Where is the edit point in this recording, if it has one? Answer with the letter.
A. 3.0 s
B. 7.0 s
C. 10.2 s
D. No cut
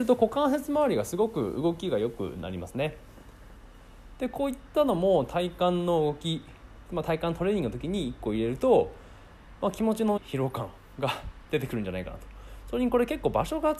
C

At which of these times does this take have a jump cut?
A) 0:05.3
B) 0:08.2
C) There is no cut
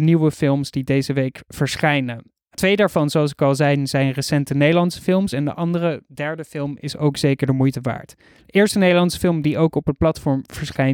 C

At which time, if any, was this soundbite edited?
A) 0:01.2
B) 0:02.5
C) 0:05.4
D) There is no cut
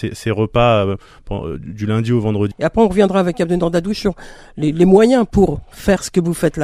B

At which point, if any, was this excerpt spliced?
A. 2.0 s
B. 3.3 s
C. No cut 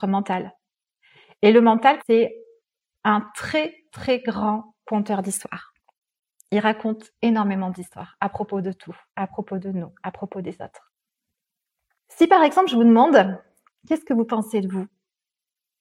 A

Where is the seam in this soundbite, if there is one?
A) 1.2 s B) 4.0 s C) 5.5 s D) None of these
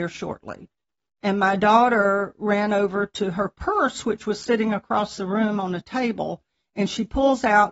A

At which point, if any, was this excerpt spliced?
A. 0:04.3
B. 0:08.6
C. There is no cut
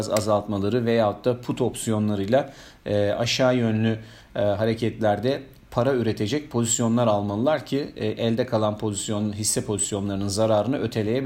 C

